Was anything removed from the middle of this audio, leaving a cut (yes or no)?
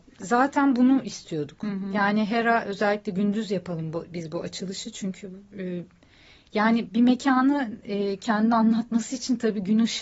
yes